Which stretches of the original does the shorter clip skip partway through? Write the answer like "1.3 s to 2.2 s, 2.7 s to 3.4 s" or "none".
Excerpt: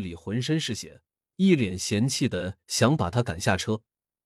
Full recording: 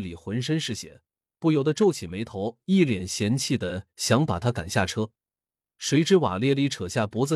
1.3 s to 2.6 s